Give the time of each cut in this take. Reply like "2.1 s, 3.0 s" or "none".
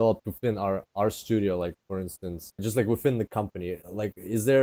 2.6 s